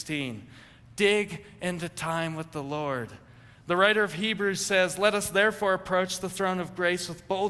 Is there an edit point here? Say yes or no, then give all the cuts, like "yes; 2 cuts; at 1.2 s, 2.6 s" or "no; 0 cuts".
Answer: no; 0 cuts